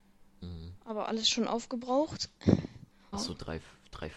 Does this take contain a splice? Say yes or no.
yes